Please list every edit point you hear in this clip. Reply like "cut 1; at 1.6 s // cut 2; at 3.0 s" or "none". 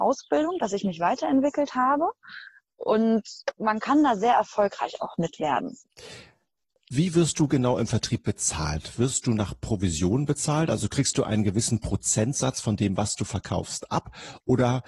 none